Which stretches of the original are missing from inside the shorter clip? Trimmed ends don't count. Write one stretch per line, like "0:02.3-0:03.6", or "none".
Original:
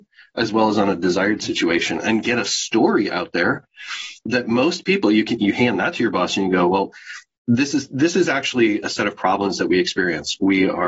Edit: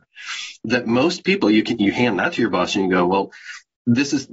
none